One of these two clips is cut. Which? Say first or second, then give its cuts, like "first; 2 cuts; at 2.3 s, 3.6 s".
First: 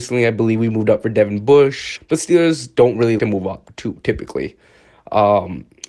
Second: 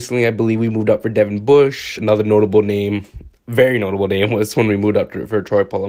first; 2 cuts; at 2.0 s, 3.2 s